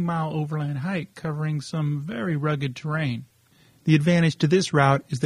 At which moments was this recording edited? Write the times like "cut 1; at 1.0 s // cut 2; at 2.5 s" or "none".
none

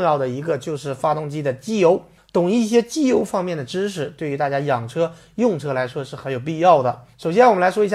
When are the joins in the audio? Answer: none

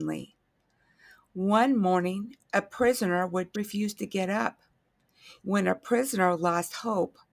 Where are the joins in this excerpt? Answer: cut 1; at 3.5 s // cut 2; at 5.4 s

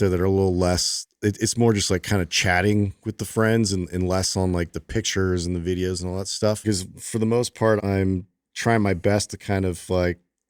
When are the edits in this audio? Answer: cut 1; at 6.6 s // cut 2; at 7.8 s

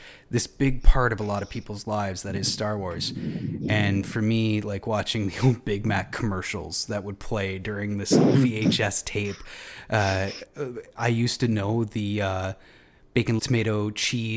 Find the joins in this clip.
cut 1; at 13.4 s

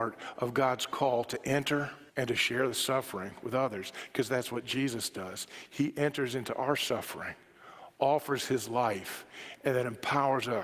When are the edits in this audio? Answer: cut 1; at 2.1 s

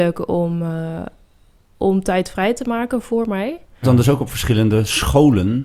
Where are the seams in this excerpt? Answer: cut 1; at 3.8 s

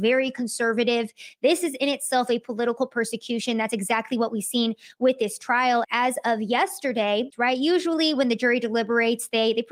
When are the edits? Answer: cut 1; at 5.8 s // cut 2; at 7.3 s

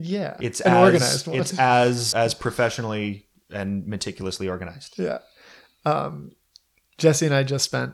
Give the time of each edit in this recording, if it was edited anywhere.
cut 1; at 2.1 s

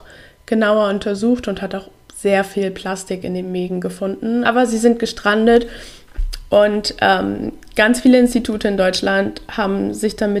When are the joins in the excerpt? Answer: cut 1; at 4.4 s

